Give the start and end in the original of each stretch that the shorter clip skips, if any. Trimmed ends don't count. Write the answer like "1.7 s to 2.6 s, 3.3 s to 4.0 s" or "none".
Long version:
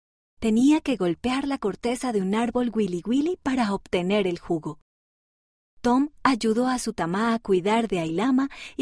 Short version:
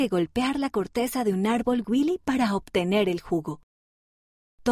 2.7 s to 3.0 s

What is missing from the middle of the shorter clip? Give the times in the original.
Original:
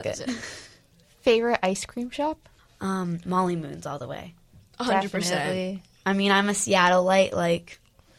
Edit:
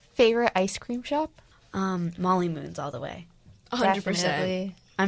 none

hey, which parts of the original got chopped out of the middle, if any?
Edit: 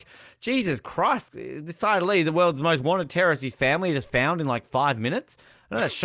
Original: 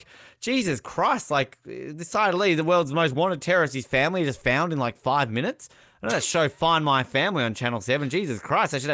1.3 s to 1.6 s

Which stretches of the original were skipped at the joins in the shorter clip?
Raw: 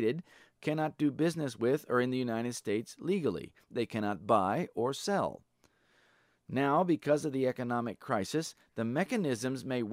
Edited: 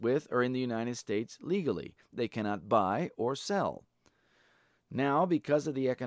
none

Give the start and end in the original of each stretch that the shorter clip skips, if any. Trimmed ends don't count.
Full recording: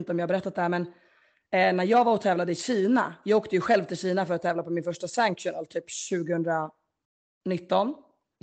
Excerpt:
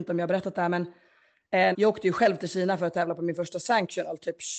1.7 s to 3.2 s

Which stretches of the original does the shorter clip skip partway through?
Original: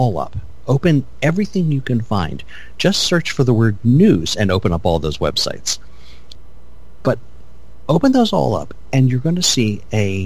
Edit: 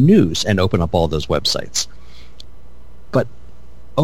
none

